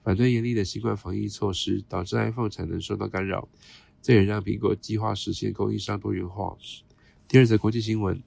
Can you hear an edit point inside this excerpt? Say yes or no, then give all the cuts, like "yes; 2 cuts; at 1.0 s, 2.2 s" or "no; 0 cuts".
no; 0 cuts